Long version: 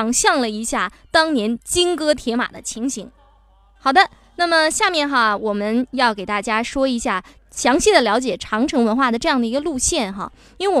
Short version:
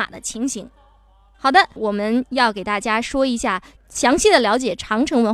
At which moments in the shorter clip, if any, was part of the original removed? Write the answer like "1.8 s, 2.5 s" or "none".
1.8 s